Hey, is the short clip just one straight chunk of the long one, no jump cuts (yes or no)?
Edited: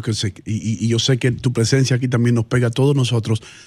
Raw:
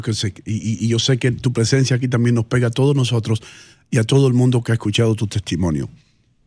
yes